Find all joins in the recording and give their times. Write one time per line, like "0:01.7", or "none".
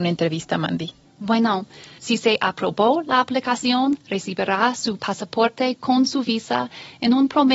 0:02.0